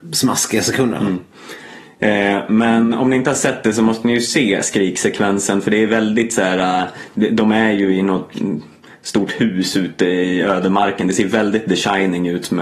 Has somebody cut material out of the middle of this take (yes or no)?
no